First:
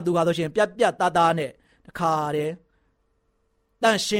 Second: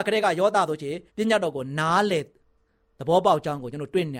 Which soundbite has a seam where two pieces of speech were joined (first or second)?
second